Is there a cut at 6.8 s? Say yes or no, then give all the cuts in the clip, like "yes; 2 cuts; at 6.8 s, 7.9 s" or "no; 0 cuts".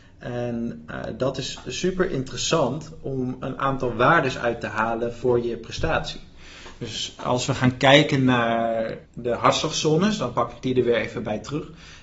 no; 1 cut; at 9.0 s